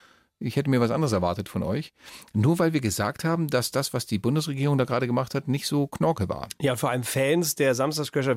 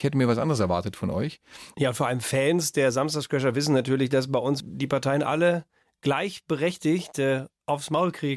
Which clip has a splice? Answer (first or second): second